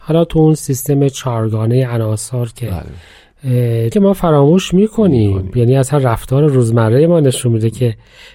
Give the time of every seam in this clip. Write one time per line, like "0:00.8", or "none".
0:03.9